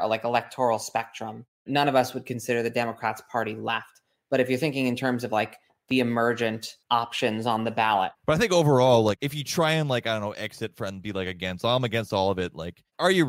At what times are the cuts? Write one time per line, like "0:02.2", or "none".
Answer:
0:06.8
0:08.1